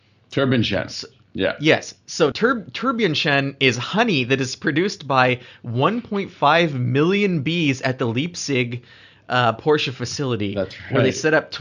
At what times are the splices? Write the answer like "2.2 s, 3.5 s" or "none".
2.3 s